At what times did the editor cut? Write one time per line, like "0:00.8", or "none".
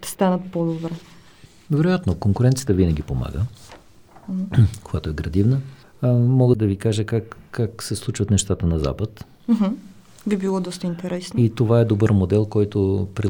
none